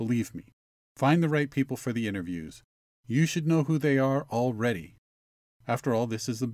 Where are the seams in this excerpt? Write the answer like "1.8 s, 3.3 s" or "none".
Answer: none